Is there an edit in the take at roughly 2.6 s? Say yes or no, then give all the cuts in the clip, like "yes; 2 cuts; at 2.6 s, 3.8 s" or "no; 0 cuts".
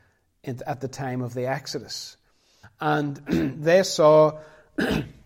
yes; 1 cut; at 2.6 s